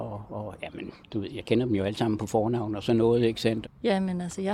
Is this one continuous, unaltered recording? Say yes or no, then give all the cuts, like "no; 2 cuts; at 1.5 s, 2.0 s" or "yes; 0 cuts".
no; 2 cuts; at 1.0 s, 3.6 s